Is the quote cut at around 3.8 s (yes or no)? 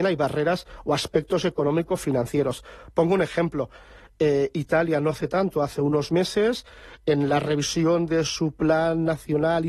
no